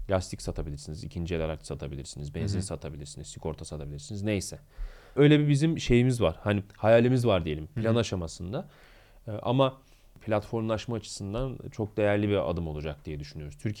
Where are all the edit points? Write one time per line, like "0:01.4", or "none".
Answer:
none